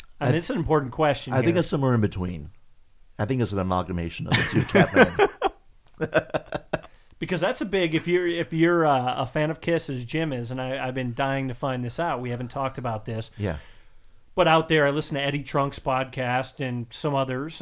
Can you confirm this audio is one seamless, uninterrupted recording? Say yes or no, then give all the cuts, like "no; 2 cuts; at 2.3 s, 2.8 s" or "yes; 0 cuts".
yes; 0 cuts